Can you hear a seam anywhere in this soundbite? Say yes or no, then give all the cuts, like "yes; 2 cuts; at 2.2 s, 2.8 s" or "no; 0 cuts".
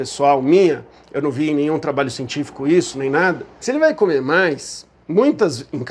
yes; 1 cut; at 3.6 s